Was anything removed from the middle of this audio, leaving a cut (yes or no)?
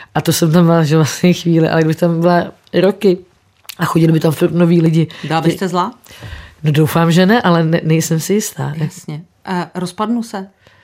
no